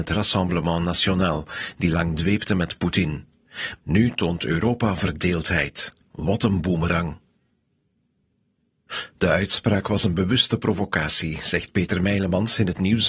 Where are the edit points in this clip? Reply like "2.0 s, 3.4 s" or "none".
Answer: 3.8 s